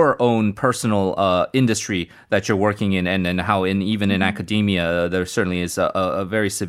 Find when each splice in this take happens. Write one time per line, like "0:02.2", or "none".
none